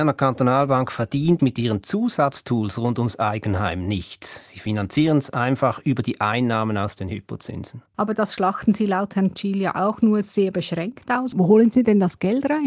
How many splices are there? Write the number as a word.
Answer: three